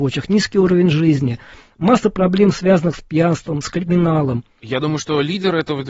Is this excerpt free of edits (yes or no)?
no